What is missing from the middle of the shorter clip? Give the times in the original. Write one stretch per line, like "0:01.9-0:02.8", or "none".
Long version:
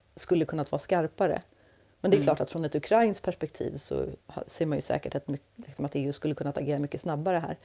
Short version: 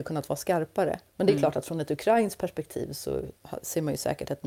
0:01.5-0:01.9